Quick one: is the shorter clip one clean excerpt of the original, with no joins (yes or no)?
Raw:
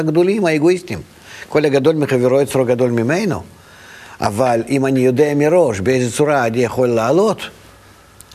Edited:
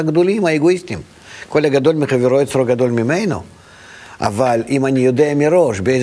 yes